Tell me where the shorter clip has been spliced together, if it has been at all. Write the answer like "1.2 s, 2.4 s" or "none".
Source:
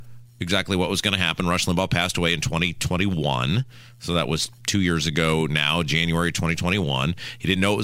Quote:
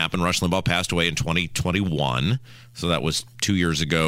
none